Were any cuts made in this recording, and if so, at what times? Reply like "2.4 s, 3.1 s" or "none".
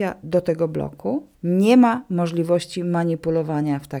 1.3 s